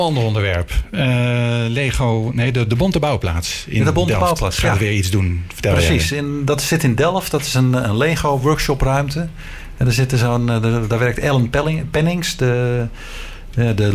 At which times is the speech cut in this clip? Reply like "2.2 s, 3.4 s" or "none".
none